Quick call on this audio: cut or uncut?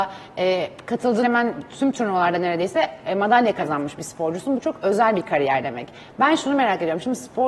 cut